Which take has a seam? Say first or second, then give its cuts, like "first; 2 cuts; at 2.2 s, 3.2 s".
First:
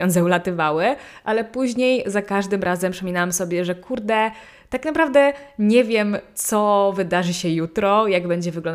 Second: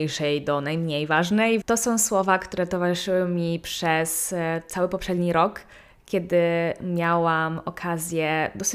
second; 1 cut; at 1.6 s